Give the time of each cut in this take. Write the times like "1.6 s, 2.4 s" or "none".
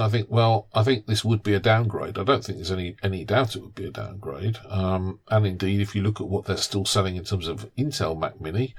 none